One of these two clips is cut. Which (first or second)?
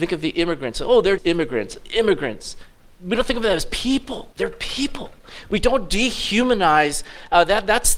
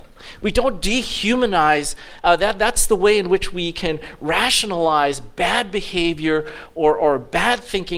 first